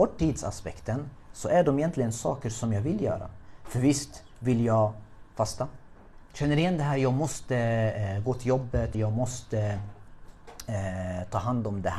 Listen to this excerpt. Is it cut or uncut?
cut